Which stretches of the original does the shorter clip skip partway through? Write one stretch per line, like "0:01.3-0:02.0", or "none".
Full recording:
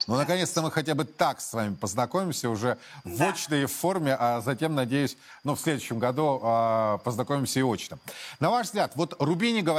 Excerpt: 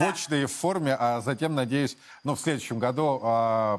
none